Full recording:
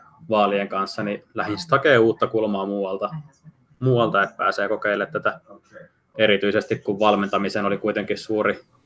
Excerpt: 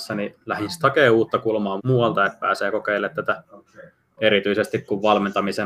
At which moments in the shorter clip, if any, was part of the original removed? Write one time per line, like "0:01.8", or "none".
0:01.8

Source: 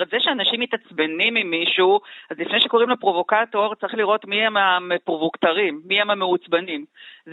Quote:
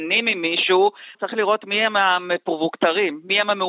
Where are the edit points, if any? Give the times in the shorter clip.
0:01.1

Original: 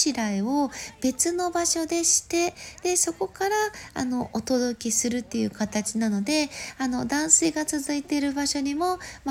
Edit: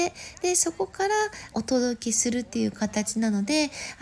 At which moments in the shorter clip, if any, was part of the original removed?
0:01.5

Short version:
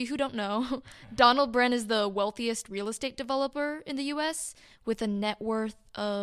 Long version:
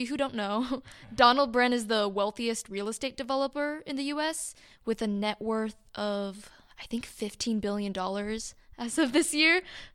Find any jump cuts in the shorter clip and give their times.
none

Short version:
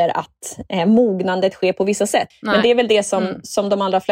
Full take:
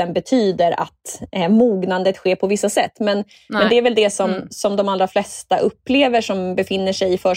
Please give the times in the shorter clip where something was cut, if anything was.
0:02.3

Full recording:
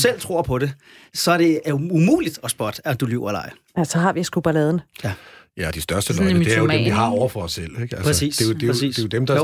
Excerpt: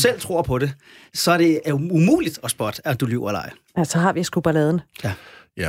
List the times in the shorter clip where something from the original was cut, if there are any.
none

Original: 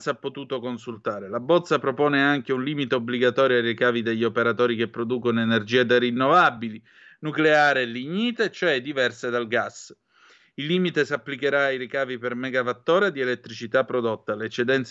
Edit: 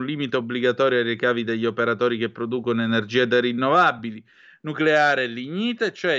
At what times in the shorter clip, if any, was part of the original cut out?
none

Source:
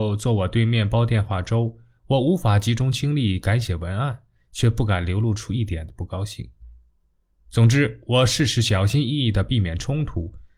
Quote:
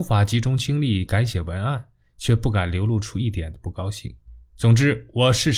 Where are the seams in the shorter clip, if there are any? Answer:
0:04.4

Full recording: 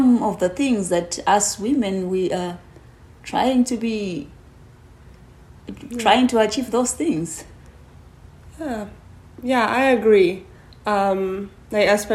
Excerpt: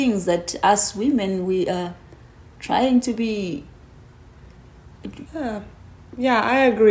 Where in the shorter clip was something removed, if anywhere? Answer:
0:05.3

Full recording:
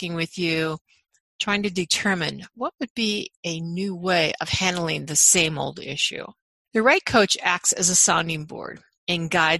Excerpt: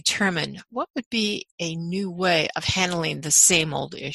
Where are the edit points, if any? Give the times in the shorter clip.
none

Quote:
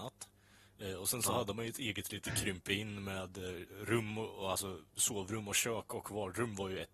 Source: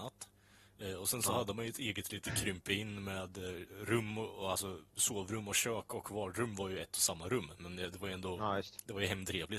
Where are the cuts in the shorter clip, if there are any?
none

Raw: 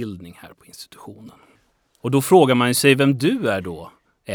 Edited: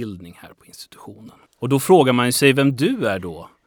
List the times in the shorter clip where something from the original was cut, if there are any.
0:01.5

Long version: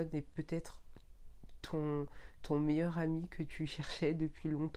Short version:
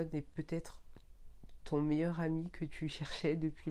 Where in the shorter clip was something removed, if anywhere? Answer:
0:01.6

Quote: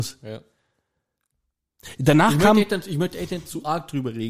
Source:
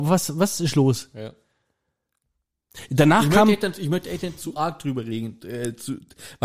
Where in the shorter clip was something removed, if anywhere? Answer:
none

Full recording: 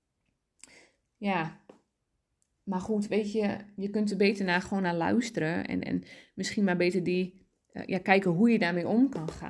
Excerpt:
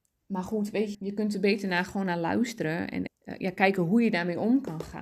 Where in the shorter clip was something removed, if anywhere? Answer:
0:00.9
0:03.1

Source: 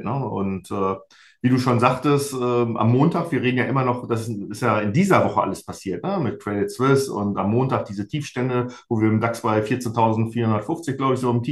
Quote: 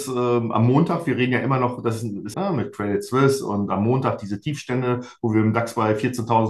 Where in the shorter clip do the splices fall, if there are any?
0:02.3

